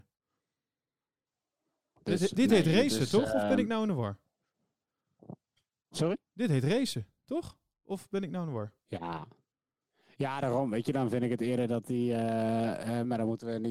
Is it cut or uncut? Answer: cut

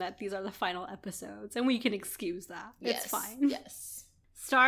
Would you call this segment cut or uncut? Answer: uncut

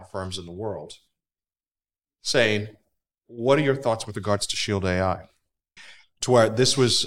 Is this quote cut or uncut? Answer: cut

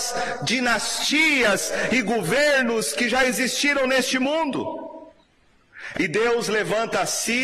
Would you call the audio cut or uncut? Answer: cut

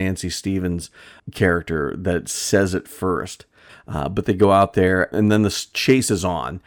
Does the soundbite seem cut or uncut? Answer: cut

